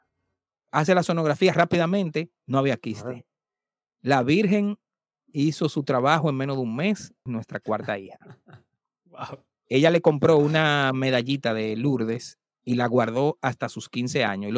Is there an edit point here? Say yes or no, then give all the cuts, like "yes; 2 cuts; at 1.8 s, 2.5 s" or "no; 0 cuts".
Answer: yes; 1 cut; at 7.3 s